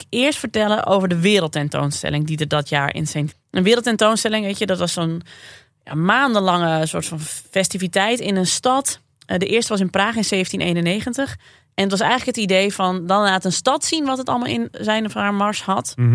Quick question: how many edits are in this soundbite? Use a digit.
1